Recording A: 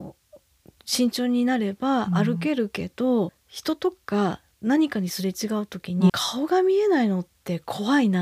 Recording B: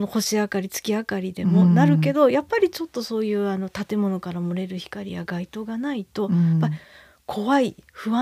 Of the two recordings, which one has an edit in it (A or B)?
A